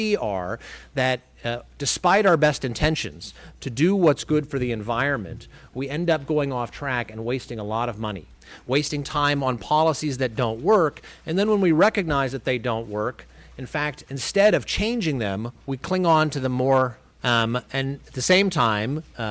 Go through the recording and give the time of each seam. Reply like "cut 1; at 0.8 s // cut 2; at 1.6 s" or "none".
cut 1; at 15.6 s // cut 2; at 17.2 s